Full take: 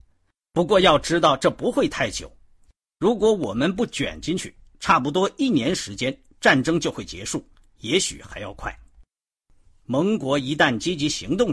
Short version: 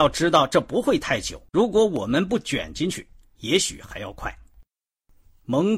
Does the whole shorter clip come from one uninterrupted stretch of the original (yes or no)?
no